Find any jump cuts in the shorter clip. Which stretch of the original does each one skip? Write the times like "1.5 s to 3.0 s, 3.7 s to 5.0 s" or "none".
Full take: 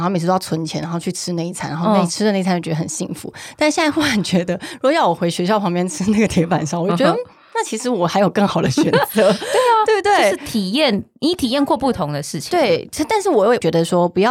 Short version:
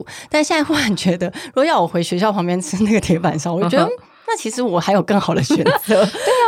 none